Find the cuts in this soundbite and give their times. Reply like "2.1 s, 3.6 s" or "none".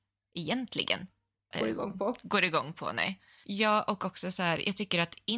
1.5 s, 3.4 s

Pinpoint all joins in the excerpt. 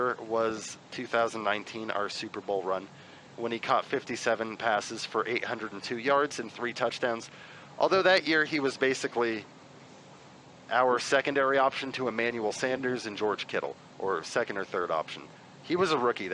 none

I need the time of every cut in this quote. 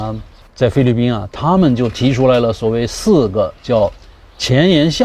none

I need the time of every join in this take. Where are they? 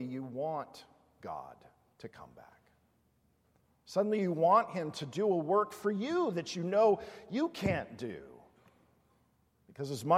none

